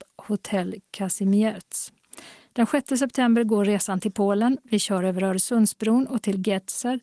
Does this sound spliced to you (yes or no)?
yes